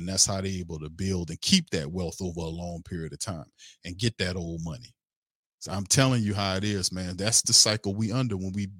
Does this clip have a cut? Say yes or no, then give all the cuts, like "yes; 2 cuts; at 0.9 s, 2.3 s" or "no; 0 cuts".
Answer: yes; 1 cut; at 7.4 s